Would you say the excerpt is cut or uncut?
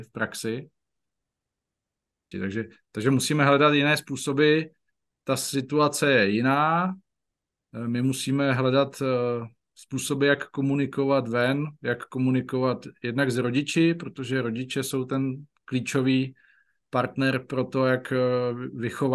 cut